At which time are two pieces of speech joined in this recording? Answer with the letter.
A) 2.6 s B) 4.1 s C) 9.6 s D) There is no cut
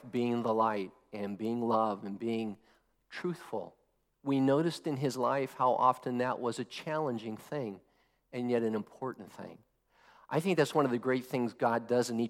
B